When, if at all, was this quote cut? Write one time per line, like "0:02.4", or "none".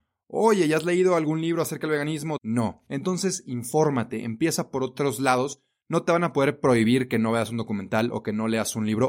0:02.4